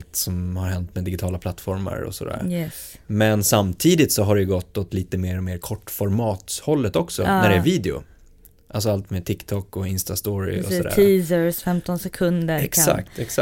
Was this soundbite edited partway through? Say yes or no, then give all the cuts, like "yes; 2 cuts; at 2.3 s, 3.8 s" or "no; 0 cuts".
no; 0 cuts